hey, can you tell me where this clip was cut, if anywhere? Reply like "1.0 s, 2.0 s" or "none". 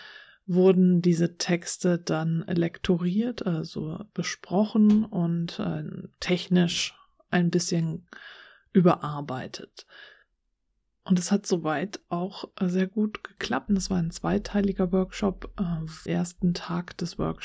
13.7 s, 16.1 s